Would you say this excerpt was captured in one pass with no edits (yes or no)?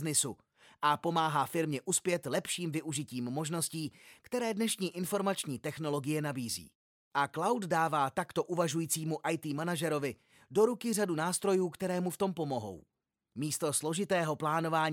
yes